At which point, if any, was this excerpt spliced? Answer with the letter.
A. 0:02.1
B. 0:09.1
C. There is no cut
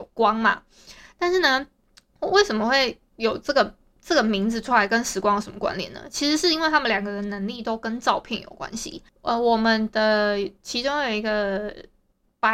C